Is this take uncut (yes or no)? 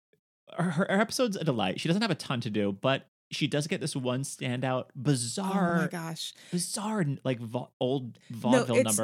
yes